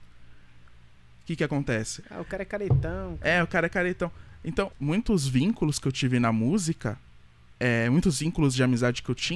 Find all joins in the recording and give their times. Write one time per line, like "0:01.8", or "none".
0:02.0
0:04.7
0:07.6